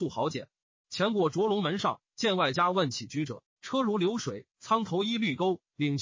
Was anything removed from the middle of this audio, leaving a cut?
yes; 1 cut; at 4.5 s

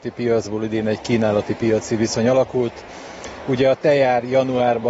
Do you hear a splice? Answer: no; 0 cuts

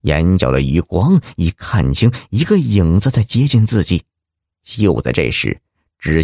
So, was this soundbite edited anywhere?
yes; 1 cut; at 4.4 s

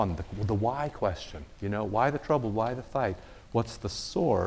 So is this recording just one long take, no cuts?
yes; 0 cuts

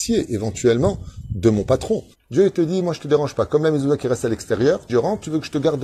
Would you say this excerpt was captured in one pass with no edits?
no; 2 cuts; at 2.1 s, 4.9 s

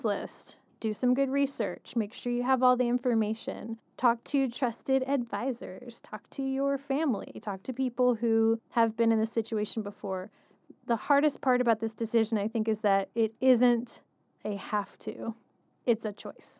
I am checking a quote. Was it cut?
yes; 1 cut; at 7.4 s

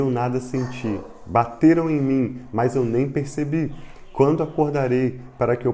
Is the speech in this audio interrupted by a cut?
no; 0 cuts

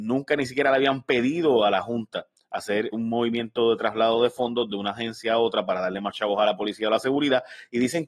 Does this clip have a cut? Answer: yes; 1 cut; at 2.9 s

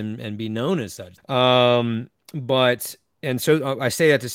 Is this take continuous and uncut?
no; 1 cut; at 1.2 s

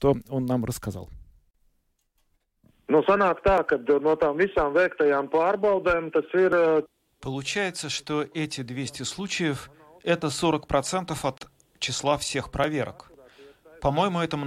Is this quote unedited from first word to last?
yes; 0 cuts

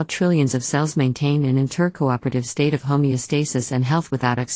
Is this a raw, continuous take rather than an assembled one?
yes; 0 cuts

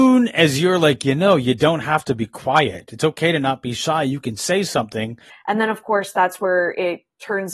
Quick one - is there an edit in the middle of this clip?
yes; 1 cut; at 5.3 s

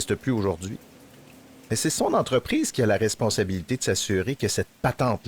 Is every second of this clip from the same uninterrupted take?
yes; 0 cuts

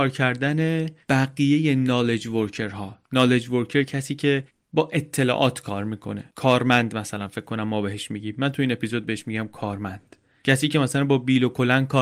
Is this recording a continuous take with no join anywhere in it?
no; 2 cuts; at 3.0 s, 6.3 s

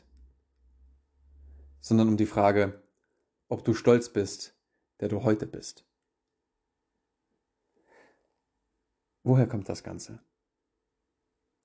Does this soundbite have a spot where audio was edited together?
yes; 1 cut; at 4.9 s

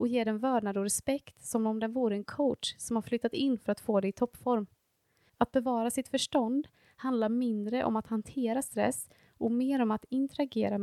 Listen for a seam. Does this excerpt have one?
yes; 1 cut; at 5.3 s

